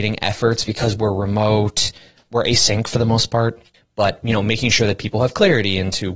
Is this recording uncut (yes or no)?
no